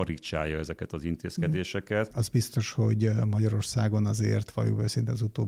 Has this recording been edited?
yes; 1 cut; at 2.1 s

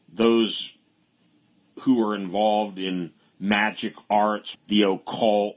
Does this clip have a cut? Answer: yes; 1 cut; at 4.5 s

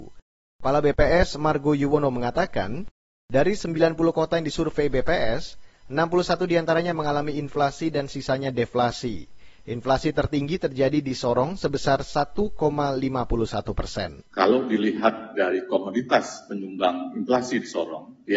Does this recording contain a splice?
no; 0 cuts

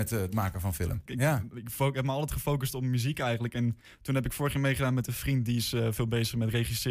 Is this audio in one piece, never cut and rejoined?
no; 1 cut; at 1.1 s

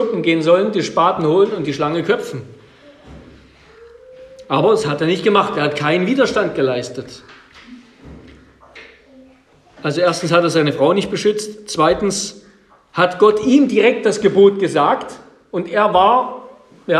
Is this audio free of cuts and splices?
yes; 0 cuts

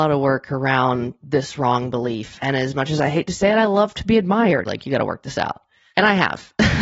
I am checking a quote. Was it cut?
yes; 2 cuts; at 2.4 s, 4.6 s

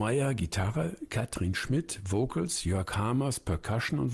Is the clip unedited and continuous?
yes; 0 cuts

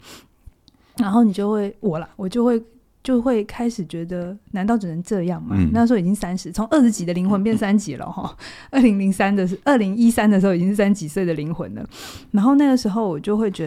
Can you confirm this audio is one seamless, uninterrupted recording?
yes; 0 cuts

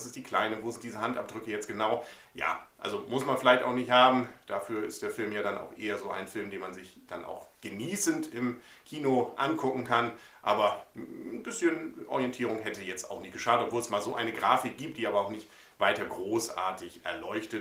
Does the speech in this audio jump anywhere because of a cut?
no; 0 cuts

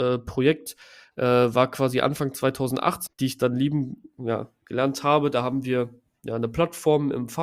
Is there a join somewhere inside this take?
yes; 1 cut; at 3.1 s

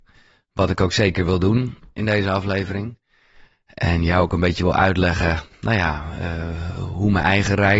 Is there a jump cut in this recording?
no; 0 cuts

